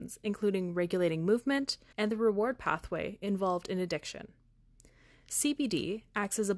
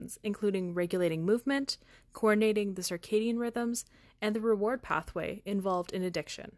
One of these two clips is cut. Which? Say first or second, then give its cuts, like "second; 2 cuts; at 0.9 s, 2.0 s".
first; 1 cut; at 1.9 s